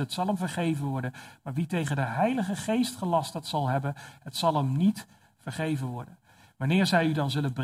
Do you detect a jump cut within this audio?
no; 0 cuts

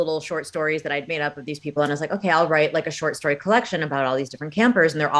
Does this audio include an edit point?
no; 0 cuts

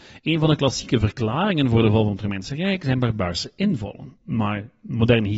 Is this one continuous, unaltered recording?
yes; 0 cuts

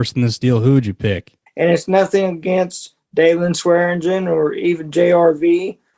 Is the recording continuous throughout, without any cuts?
no; 1 cut; at 1.5 s

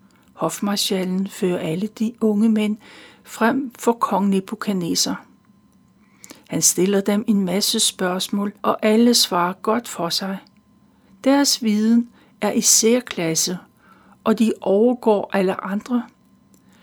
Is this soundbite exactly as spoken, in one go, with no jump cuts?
no; 2 cuts; at 8.6 s, 11.1 s

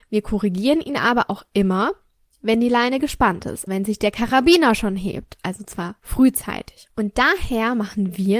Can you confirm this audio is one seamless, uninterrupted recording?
no; 2 cuts; at 3.7 s, 6.9 s

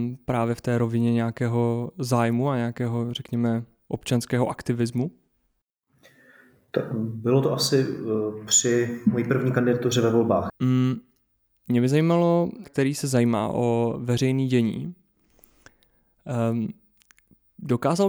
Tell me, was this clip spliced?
yes; 2 cuts; at 10.5 s, 12.6 s

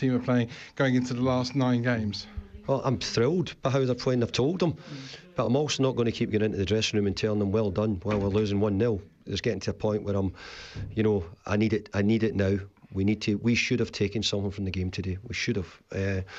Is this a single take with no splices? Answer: yes; 0 cuts

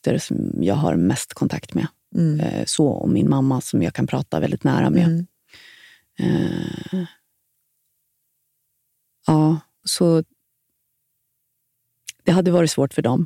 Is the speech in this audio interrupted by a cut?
yes; 1 cut; at 9.8 s

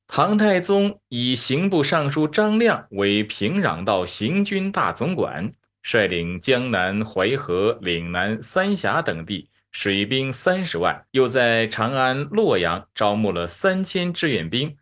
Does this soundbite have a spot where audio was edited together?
yes; 1 cut; at 11.1 s

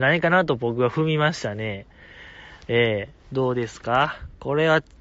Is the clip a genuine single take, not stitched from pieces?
yes; 0 cuts

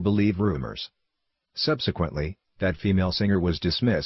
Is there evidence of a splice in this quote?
no; 0 cuts

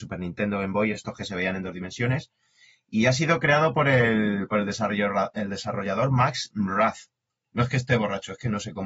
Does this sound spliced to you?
no; 0 cuts

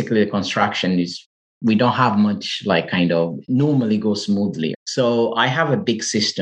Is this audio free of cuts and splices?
no; 1 cut; at 4.7 s

